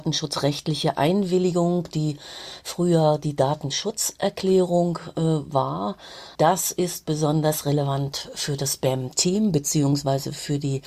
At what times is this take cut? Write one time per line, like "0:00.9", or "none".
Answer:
0:06.3